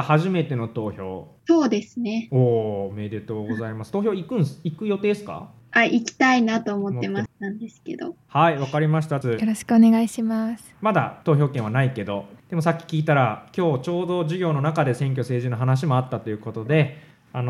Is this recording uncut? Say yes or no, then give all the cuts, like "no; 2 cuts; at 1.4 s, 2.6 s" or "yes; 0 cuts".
no; 3 cuts; at 7.3 s, 9.2 s, 10.7 s